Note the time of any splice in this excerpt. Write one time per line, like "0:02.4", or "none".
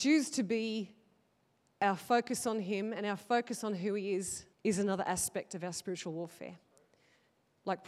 0:04.5